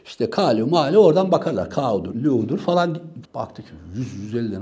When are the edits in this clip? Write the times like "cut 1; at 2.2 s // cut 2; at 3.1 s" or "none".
cut 1; at 2.1 s // cut 2; at 3.3 s

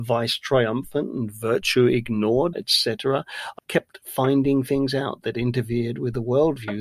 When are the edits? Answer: cut 1; at 2.5 s // cut 2; at 3.6 s

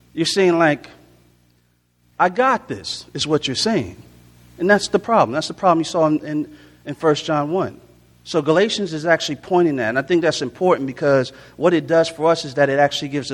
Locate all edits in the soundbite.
none

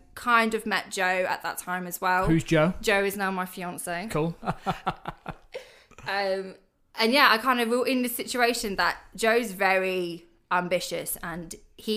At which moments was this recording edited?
cut 1; at 4.4 s

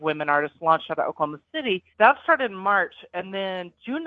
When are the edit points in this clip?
cut 1; at 1.9 s

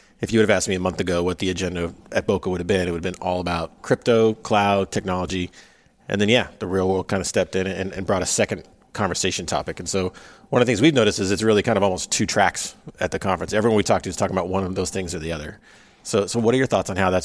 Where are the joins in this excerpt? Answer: none

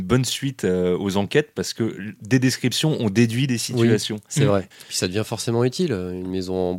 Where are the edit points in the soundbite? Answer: cut 1; at 4.7 s

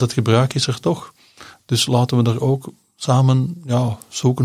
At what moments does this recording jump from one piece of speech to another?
none

